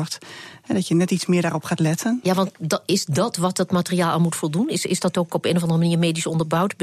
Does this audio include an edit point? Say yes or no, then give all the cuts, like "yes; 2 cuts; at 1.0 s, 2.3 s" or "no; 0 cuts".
no; 0 cuts